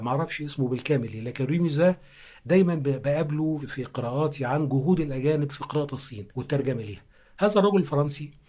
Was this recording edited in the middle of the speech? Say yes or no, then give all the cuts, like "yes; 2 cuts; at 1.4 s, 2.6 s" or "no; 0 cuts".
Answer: yes; 2 cuts; at 3.6 s, 6.3 s